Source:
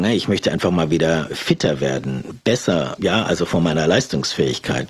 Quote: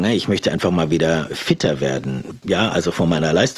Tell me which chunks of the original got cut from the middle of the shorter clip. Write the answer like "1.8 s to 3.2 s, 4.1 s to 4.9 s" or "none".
2.4 s to 3.0 s